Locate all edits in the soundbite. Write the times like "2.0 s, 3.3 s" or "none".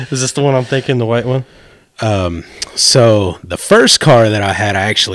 1.9 s